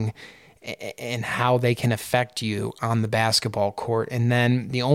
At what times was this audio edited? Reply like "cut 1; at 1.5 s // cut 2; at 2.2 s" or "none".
none